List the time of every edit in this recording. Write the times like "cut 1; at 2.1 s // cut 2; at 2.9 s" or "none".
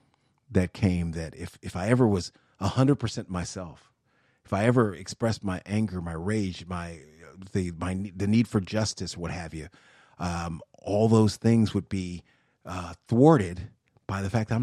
none